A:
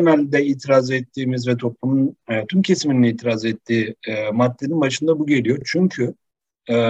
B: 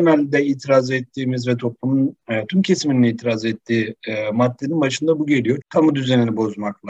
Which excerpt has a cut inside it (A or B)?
B